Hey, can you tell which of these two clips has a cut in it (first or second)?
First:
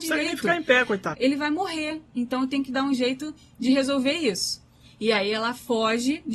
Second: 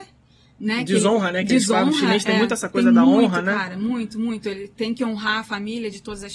first